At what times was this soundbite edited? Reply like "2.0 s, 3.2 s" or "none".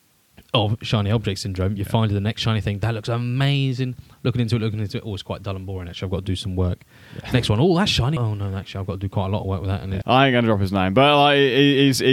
8.2 s, 10.0 s